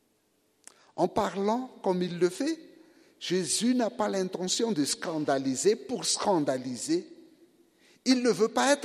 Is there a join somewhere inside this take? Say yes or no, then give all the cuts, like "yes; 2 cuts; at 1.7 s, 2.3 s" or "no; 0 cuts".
no; 0 cuts